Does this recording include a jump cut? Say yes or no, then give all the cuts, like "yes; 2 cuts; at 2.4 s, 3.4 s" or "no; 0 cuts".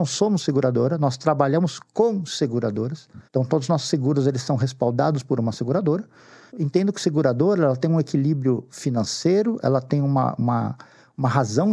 yes; 2 cuts; at 3.2 s, 6.5 s